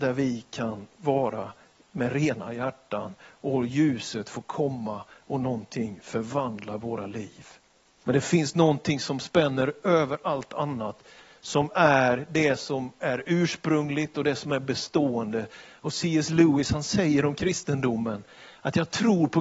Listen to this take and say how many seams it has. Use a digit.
1